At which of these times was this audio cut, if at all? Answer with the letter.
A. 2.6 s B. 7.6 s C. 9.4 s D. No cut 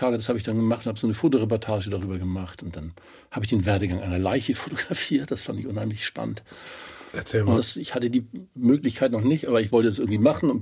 B